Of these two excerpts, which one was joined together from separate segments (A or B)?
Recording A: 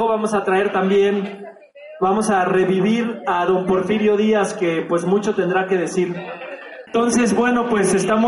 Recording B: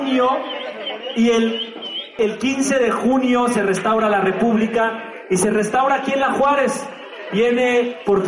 A